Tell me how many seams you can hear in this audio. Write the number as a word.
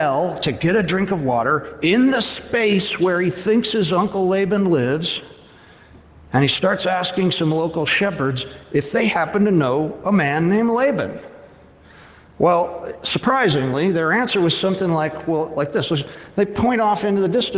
zero